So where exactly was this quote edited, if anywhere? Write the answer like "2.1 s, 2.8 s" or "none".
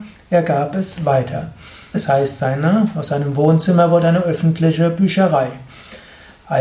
1.9 s